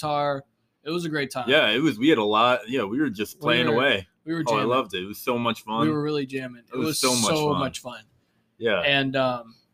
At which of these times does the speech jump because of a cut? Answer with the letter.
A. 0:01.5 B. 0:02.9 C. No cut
C